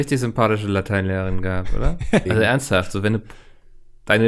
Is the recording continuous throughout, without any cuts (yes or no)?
no